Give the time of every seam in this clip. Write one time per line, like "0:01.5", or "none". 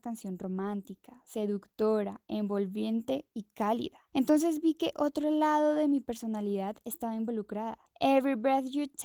none